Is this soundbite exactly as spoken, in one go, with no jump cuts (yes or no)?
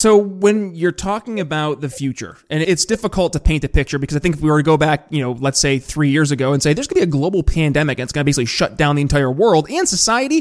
no